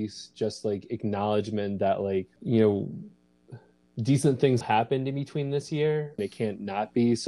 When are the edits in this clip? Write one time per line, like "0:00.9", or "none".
0:02.4
0:04.6
0:06.2